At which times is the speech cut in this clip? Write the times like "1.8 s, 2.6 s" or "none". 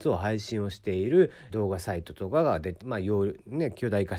1.5 s, 2.8 s